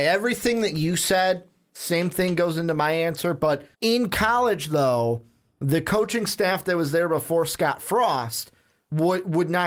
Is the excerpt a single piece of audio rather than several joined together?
no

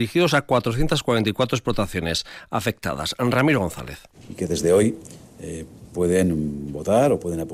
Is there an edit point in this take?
yes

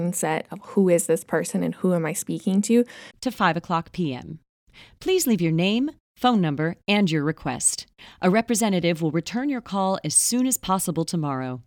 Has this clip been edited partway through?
yes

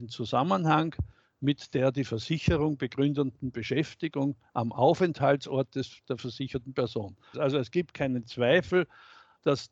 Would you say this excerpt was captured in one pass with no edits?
no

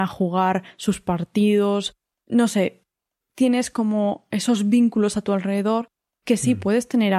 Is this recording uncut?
yes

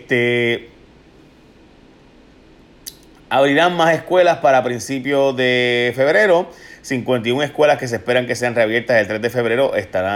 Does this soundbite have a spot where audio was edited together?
no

